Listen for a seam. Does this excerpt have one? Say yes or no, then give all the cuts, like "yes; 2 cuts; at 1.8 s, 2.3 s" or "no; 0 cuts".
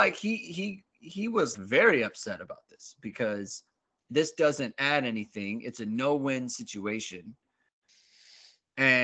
yes; 1 cut; at 1.5 s